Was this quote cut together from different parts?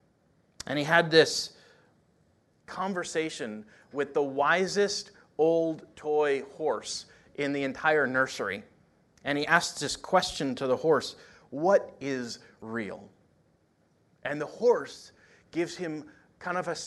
no; 0 cuts

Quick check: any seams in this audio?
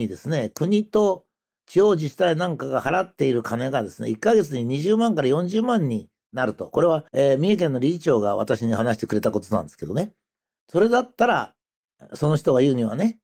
yes; 1 cut; at 7.1 s

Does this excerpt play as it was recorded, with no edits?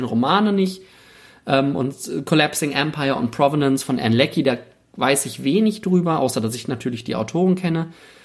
yes; 0 cuts

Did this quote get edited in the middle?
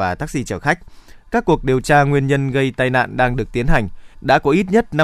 yes; 1 cut; at 4.1 s

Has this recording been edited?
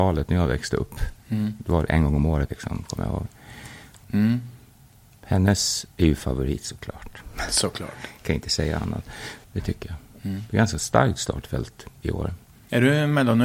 yes; 3 cuts; at 2.5 s, 4.0 s, 9.4 s

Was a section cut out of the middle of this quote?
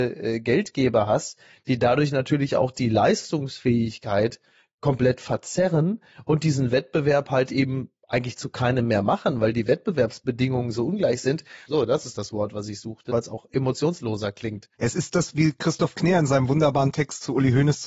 yes; 3 cuts; at 11.7 s, 13.1 s, 14.7 s

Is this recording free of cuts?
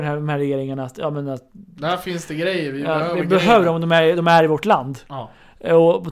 yes; 0 cuts

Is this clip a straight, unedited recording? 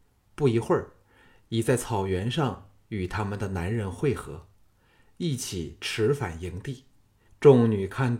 no; 1 cut; at 7.3 s

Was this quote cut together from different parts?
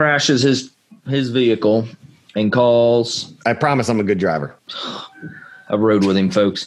yes; 1 cut; at 4.6 s

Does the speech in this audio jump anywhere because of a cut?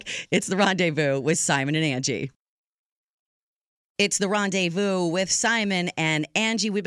no; 0 cuts

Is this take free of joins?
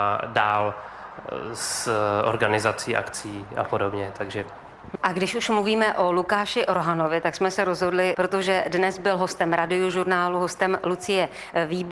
no; 2 cuts; at 5.0 s, 8.1 s

